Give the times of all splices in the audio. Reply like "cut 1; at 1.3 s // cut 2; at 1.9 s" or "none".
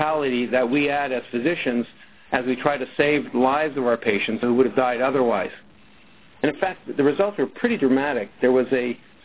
cut 1; at 6.3 s

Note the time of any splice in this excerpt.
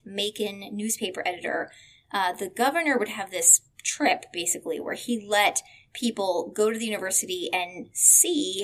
none

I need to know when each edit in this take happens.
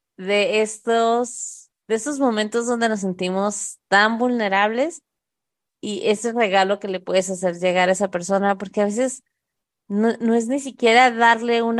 none

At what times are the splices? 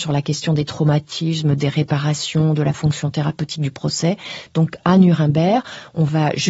cut 1; at 4.5 s

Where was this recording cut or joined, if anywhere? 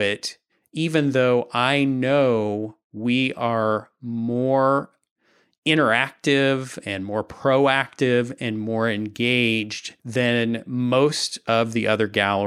cut 1; at 10.0 s

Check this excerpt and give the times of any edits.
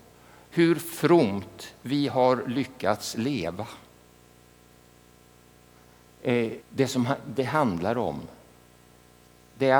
cut 1; at 6.6 s

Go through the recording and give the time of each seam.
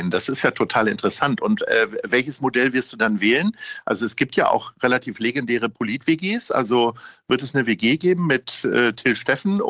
none

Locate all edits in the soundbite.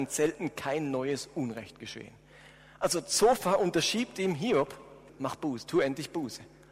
cut 1; at 5.1 s

